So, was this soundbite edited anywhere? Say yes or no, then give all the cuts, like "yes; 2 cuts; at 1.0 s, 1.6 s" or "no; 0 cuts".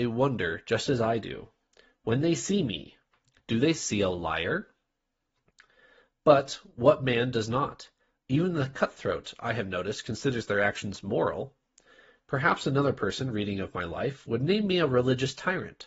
yes; 1 cut; at 6.1 s